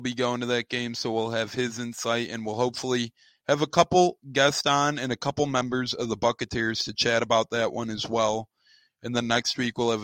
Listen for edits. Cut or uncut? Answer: uncut